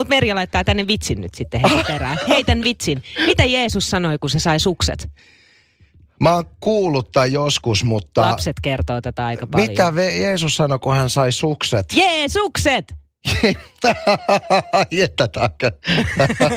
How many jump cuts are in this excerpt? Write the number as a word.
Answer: zero